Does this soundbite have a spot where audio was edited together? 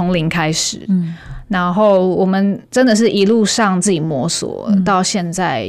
no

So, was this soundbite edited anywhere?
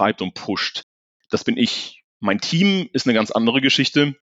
no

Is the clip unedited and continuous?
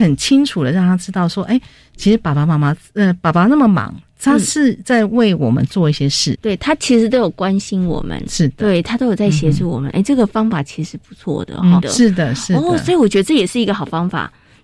no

